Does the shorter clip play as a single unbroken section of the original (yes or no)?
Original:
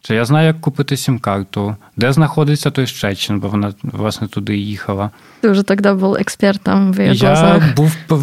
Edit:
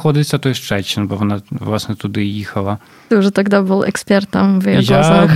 yes